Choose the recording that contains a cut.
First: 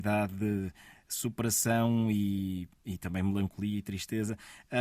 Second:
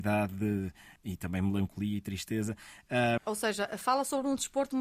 second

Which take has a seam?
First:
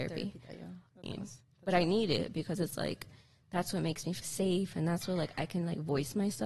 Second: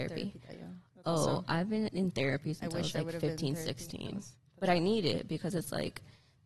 first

